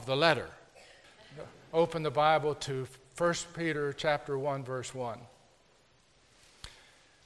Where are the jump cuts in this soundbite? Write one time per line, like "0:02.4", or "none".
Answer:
0:01.0